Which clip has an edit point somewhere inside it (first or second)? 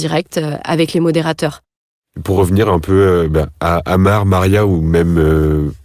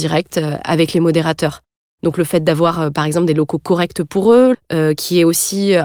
second